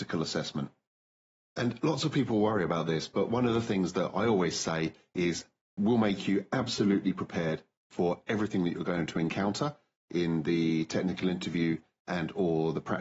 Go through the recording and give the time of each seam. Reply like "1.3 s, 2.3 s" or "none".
1.4 s